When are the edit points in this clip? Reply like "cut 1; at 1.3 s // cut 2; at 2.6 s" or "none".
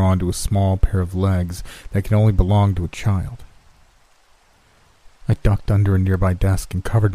cut 1; at 5.1 s